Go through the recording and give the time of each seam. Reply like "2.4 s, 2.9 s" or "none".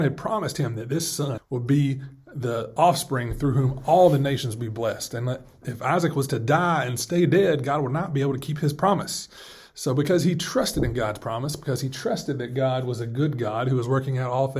1.4 s